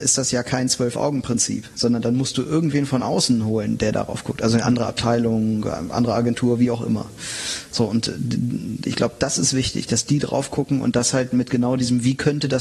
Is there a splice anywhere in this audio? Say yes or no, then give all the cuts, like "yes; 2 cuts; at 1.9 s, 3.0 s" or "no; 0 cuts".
no; 0 cuts